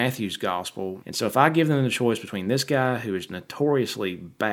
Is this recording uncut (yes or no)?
no